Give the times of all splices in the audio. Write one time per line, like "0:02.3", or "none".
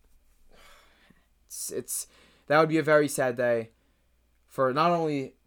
none